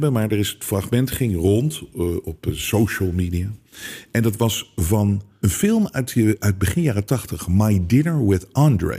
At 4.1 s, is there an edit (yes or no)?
no